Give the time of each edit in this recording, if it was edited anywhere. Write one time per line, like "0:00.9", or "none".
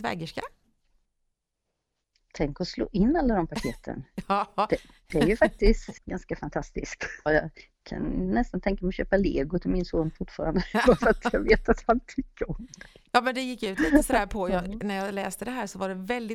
0:06.0
0:07.3